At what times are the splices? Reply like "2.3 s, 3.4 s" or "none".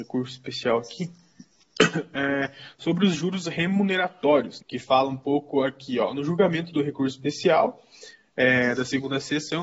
4.6 s